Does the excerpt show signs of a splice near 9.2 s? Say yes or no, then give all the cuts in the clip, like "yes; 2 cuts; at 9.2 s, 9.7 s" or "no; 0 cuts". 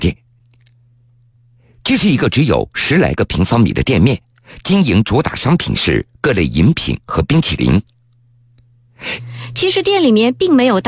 yes; 1 cut; at 9.2 s